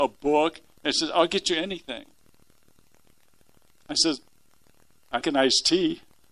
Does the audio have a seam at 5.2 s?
yes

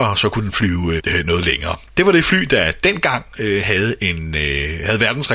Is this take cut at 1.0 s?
yes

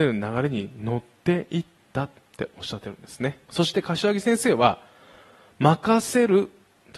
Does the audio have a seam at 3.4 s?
yes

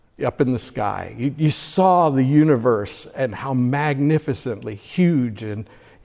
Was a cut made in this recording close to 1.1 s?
no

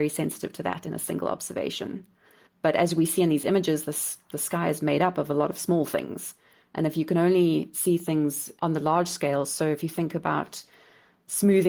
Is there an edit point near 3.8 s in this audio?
no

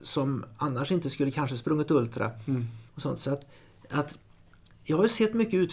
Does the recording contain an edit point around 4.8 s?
no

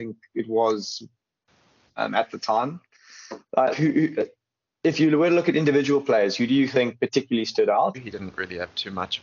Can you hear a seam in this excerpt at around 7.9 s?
yes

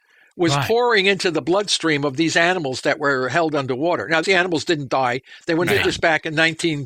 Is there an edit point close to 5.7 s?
yes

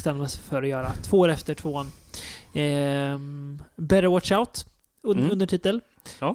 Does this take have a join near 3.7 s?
no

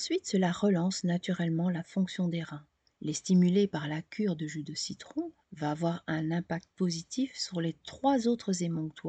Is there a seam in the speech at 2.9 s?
yes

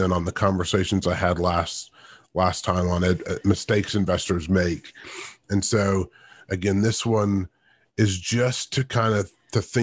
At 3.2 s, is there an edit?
yes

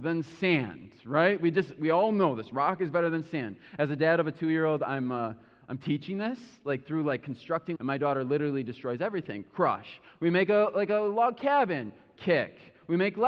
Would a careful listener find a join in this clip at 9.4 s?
no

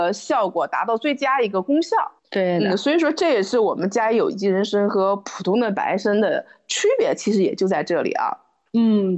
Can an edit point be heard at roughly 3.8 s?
no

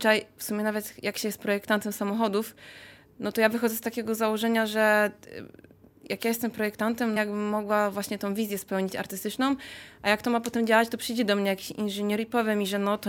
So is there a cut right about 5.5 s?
no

